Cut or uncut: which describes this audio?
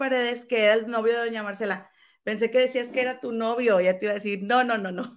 uncut